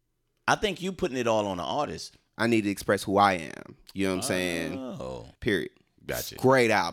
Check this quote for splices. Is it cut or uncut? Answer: cut